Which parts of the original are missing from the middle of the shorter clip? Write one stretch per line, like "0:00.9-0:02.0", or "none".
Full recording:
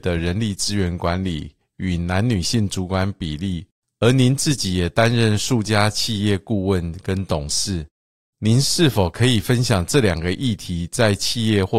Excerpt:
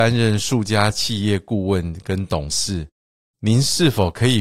none